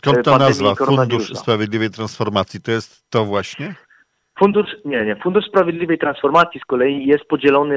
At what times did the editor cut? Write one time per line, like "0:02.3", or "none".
none